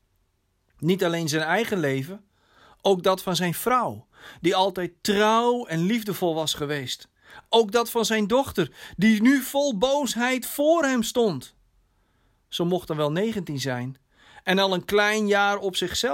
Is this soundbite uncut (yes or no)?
yes